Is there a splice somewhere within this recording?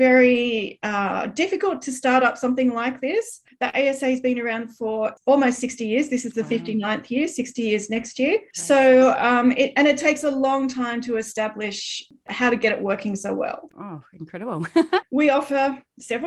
yes; 2 cuts; at 13.7 s, 15.0 s

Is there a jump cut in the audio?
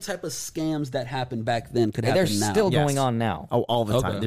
no; 0 cuts

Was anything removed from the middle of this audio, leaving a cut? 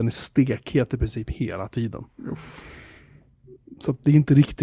no; 0 cuts

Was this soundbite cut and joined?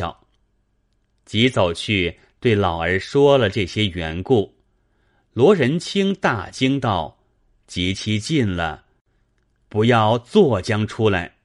no; 0 cuts

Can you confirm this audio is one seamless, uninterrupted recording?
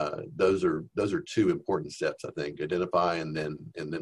yes; 0 cuts

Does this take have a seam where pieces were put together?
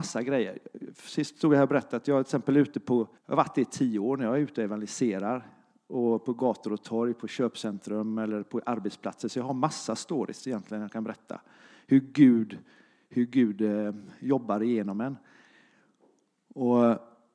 yes; 1 cut; at 3.2 s

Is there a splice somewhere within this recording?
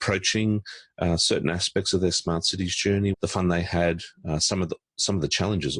yes; 1 cut; at 3.1 s

